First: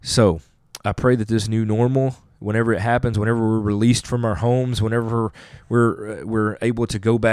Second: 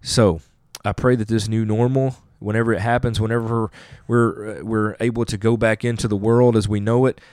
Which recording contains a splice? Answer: second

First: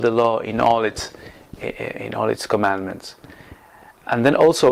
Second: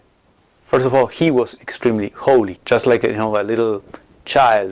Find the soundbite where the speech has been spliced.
second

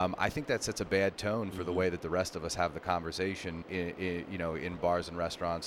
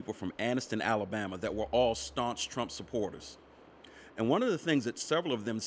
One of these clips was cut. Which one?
first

